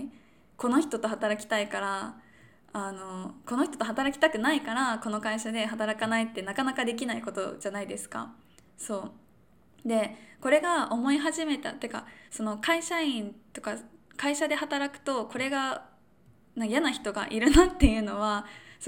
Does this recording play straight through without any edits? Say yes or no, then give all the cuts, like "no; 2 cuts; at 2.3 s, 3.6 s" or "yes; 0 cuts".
yes; 0 cuts